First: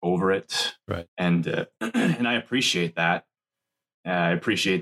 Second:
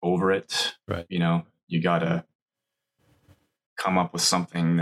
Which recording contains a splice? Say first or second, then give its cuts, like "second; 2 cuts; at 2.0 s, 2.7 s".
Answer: first; 1 cut; at 1.1 s